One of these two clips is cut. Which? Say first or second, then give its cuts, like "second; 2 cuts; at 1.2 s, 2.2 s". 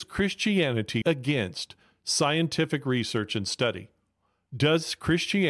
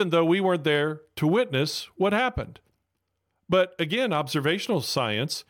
first; 1 cut; at 1.0 s